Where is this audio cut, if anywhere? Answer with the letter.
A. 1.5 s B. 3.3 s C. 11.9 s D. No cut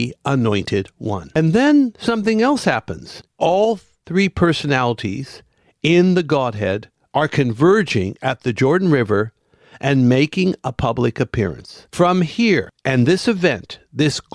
B